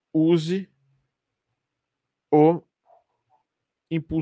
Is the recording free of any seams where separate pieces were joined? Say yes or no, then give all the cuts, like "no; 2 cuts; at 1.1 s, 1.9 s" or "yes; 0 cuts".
yes; 0 cuts